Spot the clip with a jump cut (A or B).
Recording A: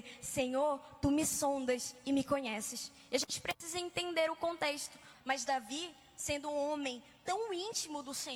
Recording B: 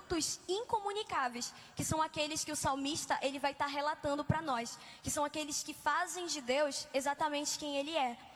A